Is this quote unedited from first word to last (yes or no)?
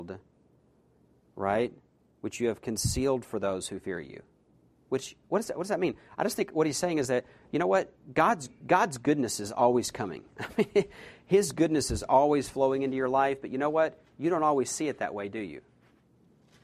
yes